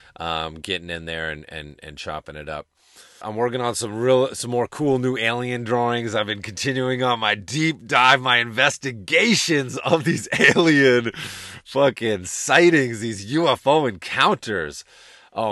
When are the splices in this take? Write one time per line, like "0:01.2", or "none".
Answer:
0:03.2